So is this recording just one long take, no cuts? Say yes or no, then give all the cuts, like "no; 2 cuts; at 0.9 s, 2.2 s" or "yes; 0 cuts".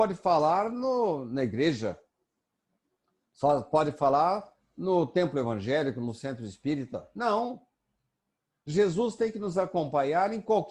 yes; 0 cuts